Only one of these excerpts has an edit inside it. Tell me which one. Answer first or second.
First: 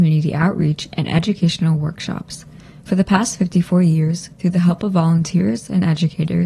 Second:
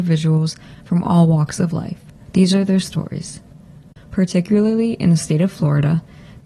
second